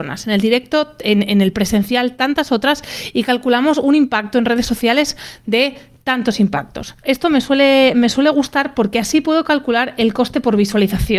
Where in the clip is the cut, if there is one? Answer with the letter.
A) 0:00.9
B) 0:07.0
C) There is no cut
B